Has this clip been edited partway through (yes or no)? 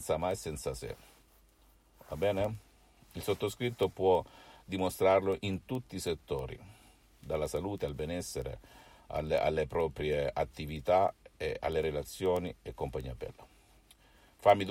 no